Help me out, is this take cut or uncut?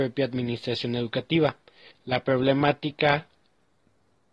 cut